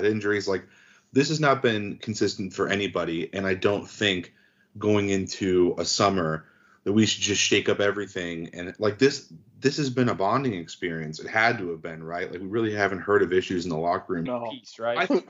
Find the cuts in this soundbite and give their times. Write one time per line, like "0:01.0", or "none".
0:14.3

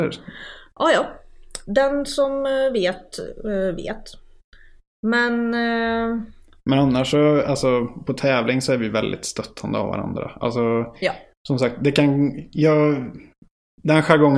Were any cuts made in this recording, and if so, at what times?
none

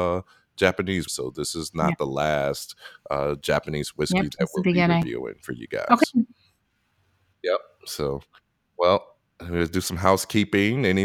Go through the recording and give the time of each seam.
0:01.1

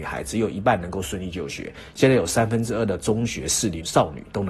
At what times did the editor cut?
none

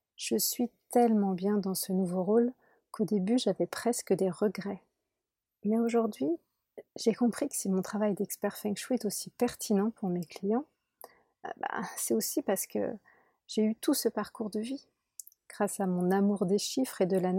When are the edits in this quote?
0:05.5
0:15.4

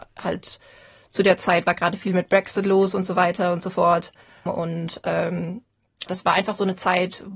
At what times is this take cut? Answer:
0:04.5
0:06.1

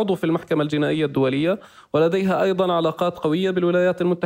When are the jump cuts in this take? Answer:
none

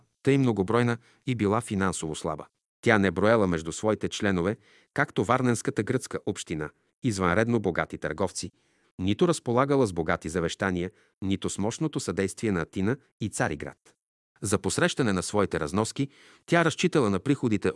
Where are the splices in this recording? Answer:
0:08.8

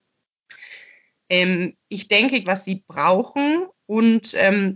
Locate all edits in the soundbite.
0:01.2
0:02.4

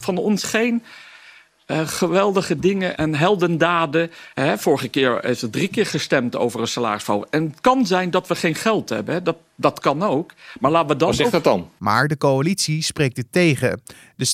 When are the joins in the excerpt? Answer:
0:03.0
0:04.3
0:11.8

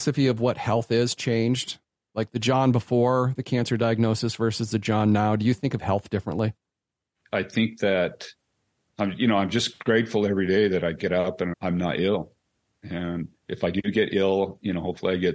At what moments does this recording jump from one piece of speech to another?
0:11.5
0:13.4

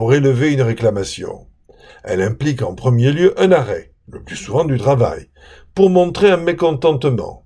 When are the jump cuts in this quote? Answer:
0:01.9

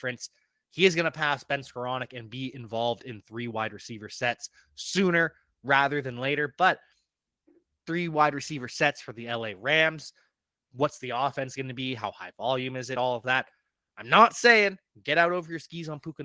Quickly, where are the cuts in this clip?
none

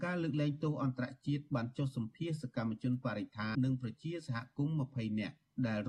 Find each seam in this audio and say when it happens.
0:03.5

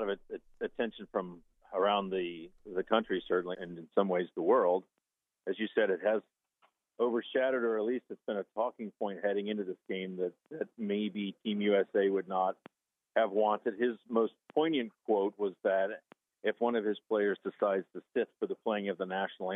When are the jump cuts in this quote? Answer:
0:03.5

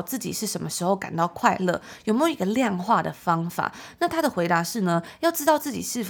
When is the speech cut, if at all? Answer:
none

